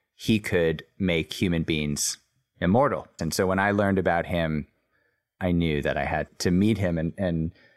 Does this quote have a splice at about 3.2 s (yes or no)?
yes